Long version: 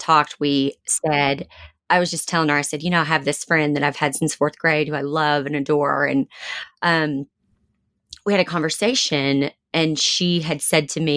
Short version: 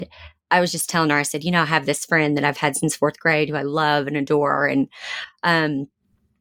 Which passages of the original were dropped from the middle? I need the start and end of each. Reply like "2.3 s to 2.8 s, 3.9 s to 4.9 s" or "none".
none